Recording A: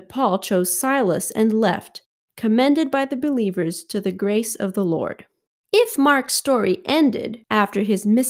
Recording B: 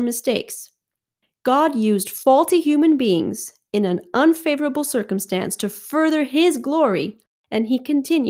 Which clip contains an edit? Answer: A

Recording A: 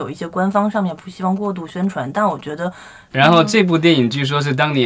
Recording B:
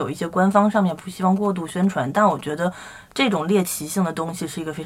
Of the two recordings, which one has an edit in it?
A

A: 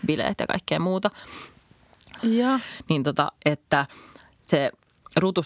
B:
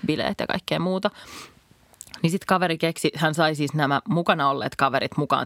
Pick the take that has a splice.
A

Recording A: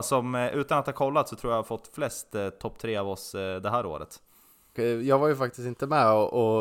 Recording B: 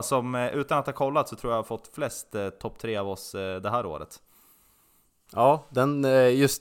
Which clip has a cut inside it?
A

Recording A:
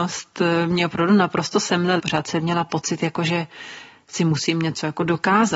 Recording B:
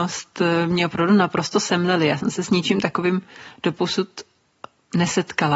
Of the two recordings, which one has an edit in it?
A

